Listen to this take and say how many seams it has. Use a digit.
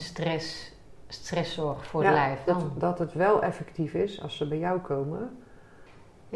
1